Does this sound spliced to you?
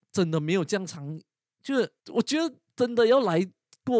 yes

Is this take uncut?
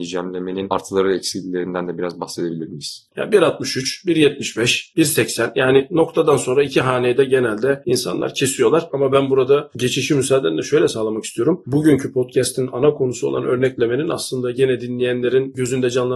no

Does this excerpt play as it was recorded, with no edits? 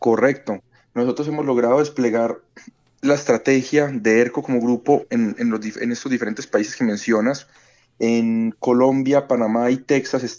yes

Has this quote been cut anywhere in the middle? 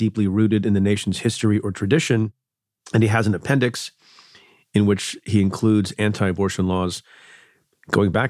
no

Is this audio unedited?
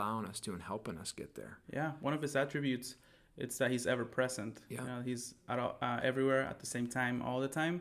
yes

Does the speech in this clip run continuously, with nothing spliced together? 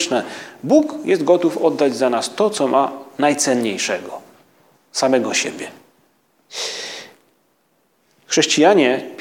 yes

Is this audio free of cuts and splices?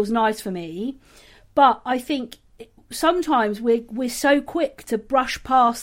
yes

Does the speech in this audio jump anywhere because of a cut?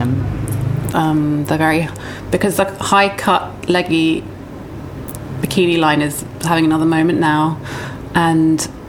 yes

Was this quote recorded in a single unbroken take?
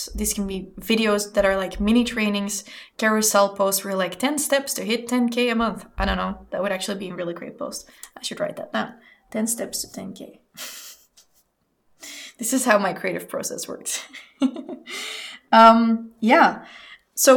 yes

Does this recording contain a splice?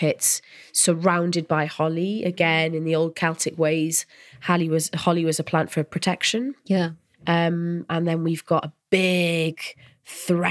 no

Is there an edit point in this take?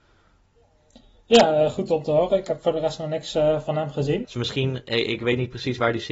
yes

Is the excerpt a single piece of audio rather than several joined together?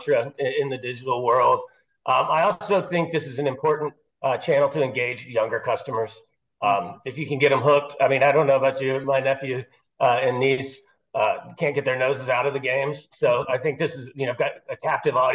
yes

